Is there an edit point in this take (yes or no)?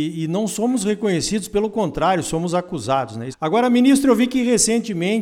yes